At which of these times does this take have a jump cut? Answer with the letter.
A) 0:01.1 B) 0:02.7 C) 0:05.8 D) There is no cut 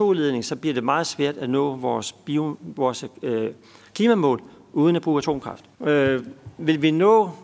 C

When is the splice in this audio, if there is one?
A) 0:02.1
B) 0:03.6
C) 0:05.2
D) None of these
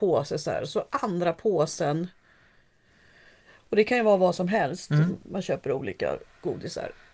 D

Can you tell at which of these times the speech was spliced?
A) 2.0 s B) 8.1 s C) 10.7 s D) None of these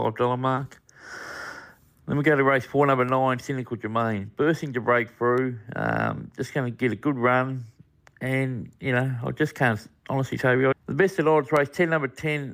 C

